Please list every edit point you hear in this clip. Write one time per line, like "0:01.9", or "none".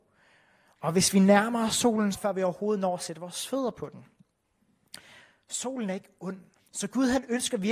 0:02.1
0:06.6